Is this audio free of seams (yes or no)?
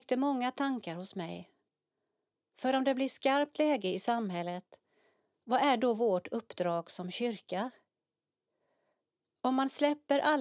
yes